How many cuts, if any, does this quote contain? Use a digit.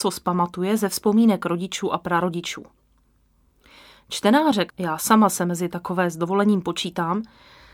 1